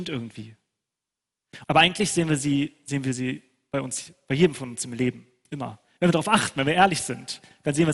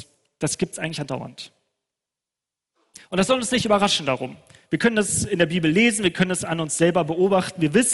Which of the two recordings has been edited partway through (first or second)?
first